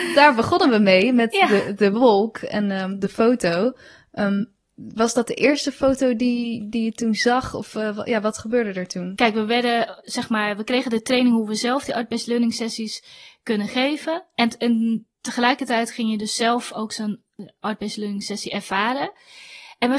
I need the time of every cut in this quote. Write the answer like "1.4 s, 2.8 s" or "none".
none